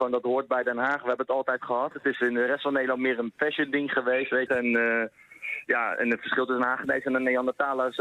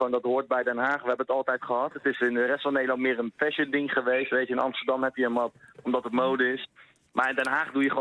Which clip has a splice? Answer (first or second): first